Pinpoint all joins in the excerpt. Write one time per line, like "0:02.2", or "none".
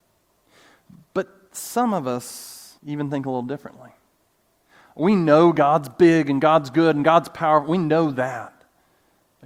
0:02.8